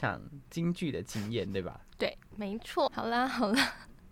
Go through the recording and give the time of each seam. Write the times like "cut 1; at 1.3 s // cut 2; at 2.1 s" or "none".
cut 1; at 2.9 s

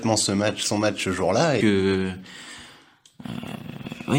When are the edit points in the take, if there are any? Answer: cut 1; at 1.6 s

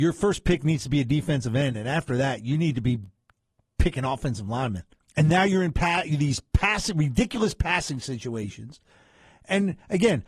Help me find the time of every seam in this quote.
cut 1; at 5.0 s

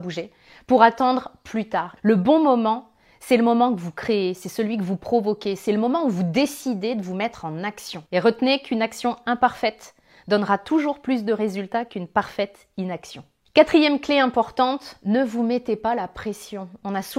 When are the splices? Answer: cut 1; at 2.0 s // cut 2; at 8.1 s

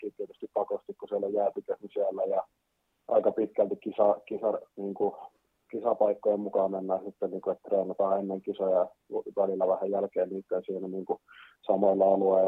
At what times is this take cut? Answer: none

